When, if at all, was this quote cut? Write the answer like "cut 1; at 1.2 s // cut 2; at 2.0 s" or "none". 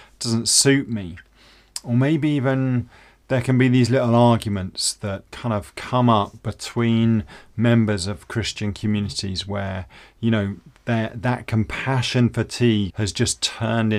cut 1; at 5.3 s // cut 2; at 12.9 s